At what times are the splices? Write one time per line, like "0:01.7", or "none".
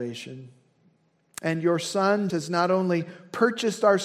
0:02.3